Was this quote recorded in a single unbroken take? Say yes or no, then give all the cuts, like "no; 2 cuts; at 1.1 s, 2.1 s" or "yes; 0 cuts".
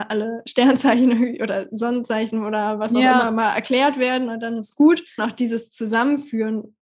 no; 1 cut; at 5.2 s